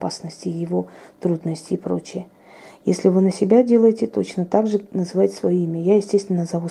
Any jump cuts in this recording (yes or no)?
no